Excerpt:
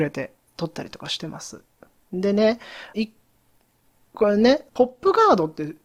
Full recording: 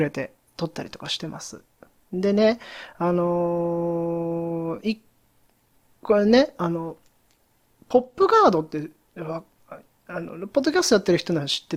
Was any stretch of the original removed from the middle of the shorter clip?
yes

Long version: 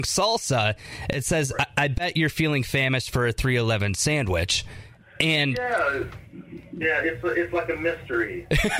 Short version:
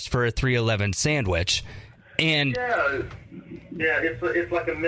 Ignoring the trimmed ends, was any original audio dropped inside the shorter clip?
no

